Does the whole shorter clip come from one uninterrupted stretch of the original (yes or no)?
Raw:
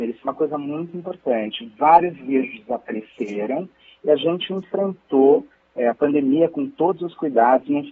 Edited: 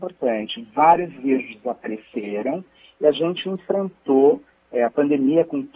yes